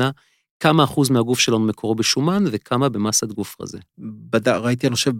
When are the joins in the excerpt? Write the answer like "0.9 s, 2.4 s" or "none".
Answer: 3.9 s